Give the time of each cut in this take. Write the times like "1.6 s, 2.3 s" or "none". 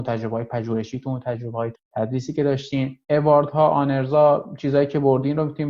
1.7 s, 3.0 s